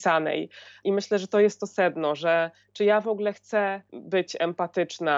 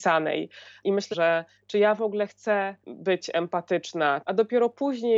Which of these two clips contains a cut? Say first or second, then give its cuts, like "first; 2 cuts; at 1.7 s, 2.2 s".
second; 2 cuts; at 1.1 s, 4.2 s